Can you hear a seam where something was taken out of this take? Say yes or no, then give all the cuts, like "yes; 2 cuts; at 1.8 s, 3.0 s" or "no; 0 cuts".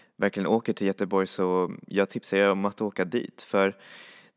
yes; 1 cut; at 1.8 s